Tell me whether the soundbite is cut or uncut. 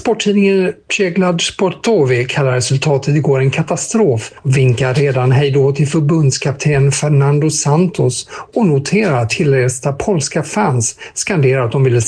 uncut